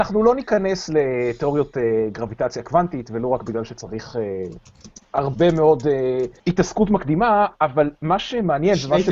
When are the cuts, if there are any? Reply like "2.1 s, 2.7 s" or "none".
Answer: 6.4 s